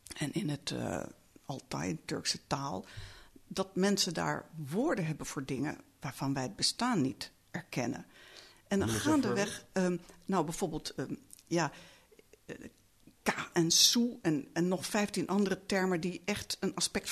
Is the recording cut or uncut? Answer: uncut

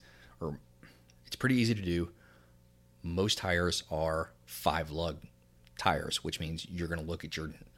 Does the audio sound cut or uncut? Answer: uncut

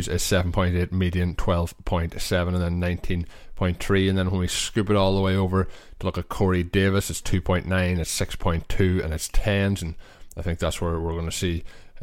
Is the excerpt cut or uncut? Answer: cut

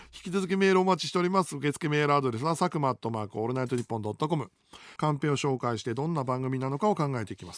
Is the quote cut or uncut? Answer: cut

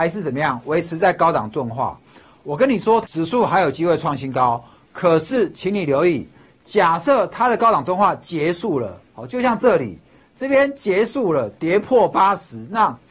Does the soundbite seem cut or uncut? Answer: cut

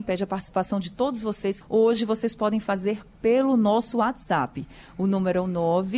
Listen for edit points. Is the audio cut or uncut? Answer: cut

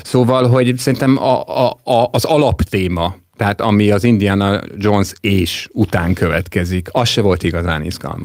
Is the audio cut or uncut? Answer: uncut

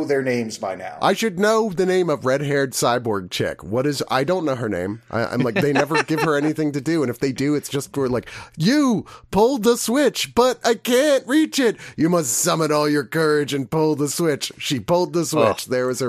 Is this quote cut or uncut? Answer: uncut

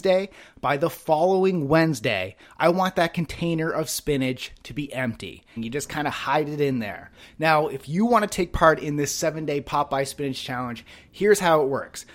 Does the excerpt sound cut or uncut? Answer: cut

